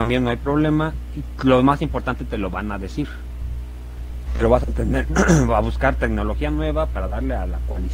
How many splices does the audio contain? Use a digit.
1